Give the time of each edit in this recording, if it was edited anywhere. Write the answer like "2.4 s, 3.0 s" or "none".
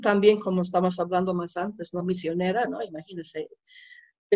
2.0 s